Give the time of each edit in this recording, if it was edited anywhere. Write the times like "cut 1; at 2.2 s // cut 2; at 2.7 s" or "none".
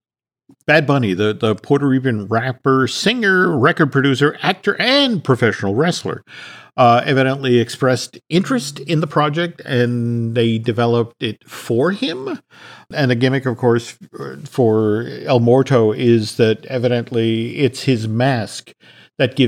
none

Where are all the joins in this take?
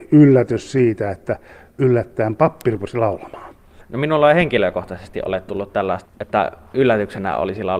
cut 1; at 3.8 s // cut 2; at 6.0 s

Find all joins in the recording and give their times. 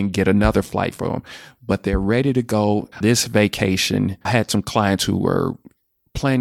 cut 1; at 2.9 s // cut 2; at 4.2 s

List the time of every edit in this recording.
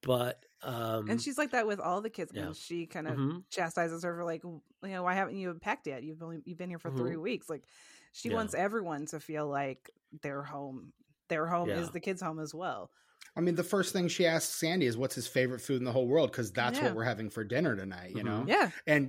cut 1; at 2.3 s

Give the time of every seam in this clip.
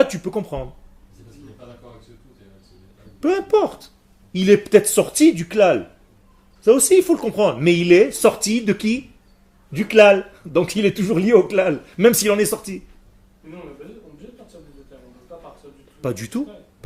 none

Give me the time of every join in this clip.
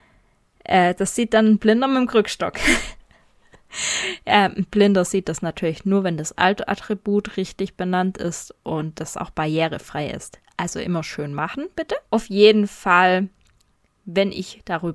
cut 1; at 12.1 s

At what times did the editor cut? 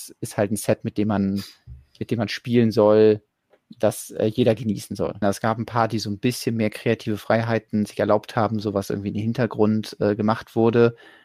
cut 1; at 5.2 s

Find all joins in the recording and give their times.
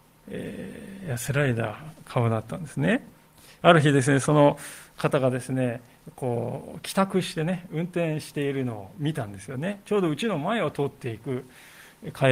cut 1; at 3.5 s

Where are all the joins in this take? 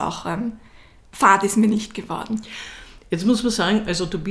none

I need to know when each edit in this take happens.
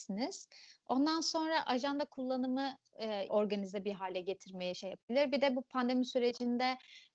cut 1; at 3.3 s

